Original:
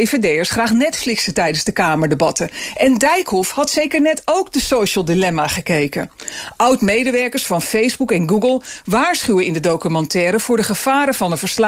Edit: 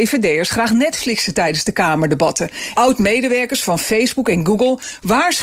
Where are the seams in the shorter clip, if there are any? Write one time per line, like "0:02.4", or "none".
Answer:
0:02.7